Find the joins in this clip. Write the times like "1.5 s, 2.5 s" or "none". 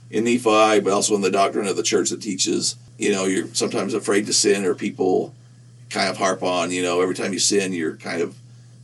none